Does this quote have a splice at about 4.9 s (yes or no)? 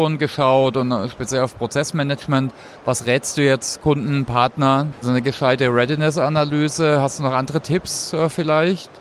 yes